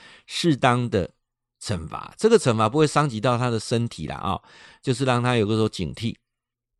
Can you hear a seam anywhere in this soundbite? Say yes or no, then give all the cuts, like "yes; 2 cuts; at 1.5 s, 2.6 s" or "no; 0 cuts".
no; 0 cuts